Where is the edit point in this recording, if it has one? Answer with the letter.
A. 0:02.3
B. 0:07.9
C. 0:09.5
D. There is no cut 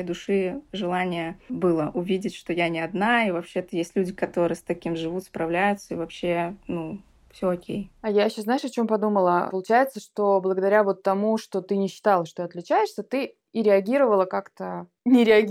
D